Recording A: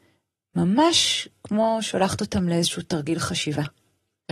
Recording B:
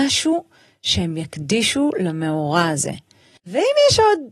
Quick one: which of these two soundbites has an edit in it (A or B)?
B